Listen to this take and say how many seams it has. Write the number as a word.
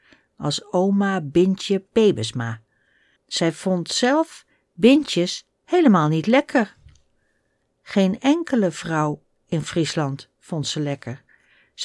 one